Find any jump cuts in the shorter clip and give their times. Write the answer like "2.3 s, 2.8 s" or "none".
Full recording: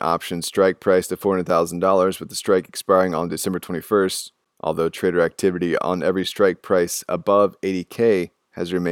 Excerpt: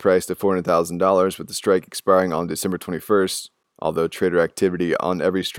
none